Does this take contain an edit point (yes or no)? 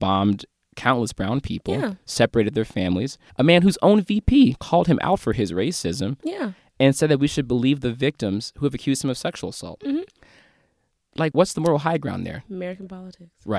yes